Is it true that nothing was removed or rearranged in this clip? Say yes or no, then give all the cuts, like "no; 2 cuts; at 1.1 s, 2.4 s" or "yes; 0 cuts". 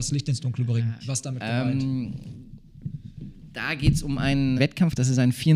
no; 2 cuts; at 1.0 s, 4.6 s